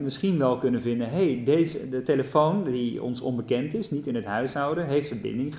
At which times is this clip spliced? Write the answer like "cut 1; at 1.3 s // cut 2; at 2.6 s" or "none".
none